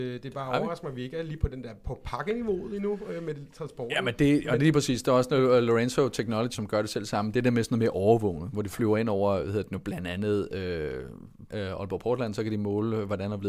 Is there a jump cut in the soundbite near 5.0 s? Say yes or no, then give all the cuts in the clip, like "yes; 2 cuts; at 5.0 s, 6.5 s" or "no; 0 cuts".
no; 2 cuts; at 6.5 s, 11.5 s